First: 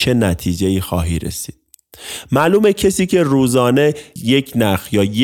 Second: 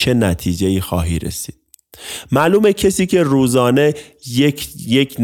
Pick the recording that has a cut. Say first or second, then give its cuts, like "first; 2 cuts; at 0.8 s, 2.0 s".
first; 1 cut; at 4.2 s